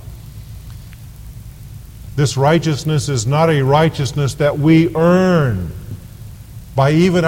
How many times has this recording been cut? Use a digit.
1